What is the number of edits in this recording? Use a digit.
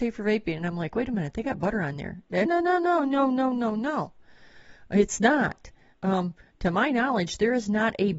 1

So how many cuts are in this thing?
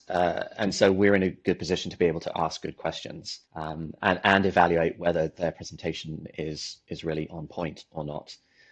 1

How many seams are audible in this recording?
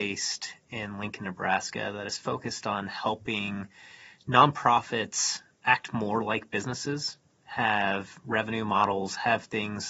0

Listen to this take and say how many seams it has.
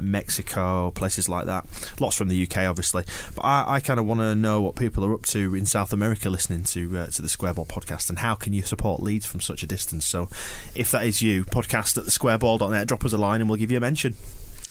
0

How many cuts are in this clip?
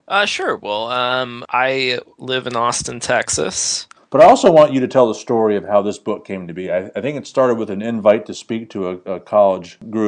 1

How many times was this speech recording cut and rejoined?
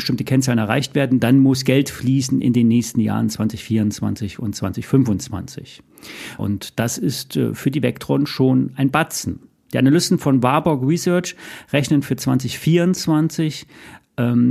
1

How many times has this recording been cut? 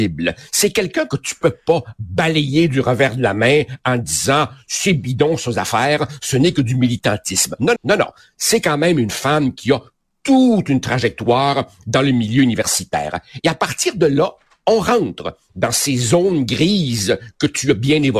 1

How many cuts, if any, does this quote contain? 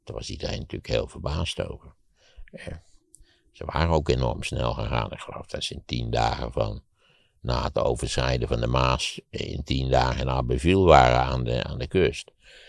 1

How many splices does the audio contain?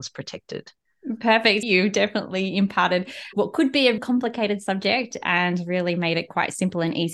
2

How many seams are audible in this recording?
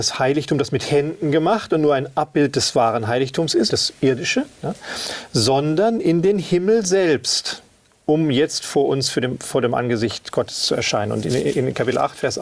1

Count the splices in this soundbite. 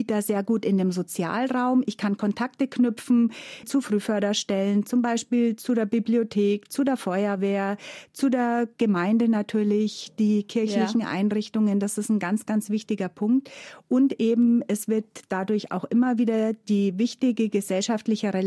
0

